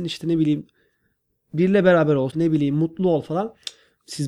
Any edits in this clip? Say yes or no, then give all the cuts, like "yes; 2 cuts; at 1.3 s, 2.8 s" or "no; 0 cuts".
yes; 1 cut; at 2.3 s